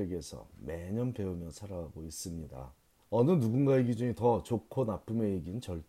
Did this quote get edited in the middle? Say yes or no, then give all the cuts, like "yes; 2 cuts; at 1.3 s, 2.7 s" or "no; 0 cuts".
yes; 1 cut; at 3.0 s